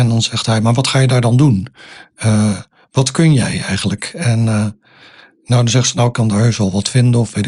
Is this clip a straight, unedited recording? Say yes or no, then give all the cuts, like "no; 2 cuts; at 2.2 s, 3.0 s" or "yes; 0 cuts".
yes; 0 cuts